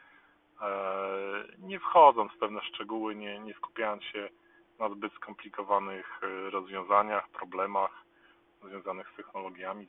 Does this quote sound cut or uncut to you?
uncut